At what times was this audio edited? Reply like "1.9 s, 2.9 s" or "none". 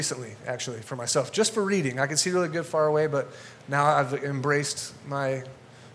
none